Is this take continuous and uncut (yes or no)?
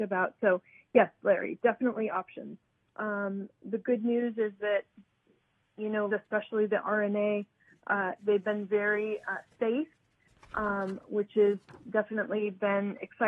no